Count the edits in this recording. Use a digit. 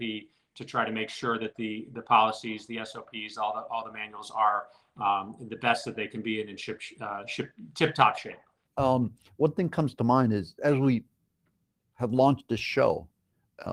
2